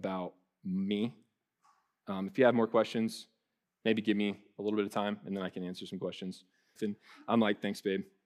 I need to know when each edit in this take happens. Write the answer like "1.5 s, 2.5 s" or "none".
3.6 s, 6.8 s